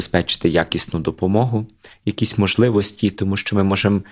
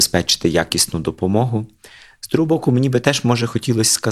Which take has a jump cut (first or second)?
first